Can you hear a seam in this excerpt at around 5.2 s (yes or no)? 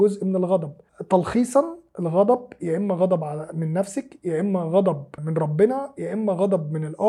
yes